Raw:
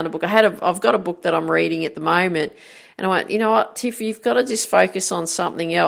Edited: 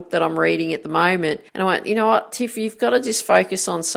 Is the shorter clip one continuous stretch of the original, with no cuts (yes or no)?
no